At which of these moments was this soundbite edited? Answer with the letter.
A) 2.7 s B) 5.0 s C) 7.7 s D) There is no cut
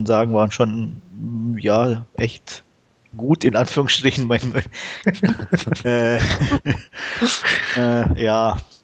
B